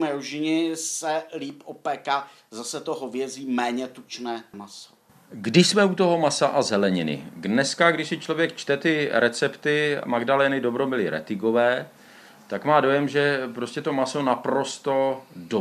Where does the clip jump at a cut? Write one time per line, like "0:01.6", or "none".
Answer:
none